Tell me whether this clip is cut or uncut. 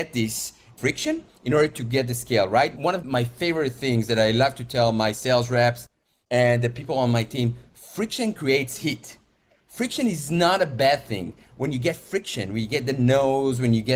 uncut